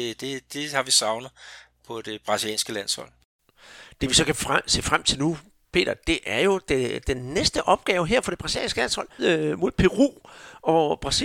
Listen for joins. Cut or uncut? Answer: cut